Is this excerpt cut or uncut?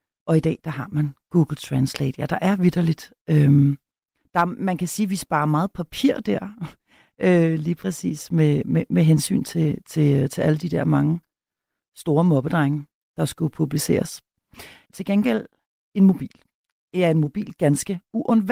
cut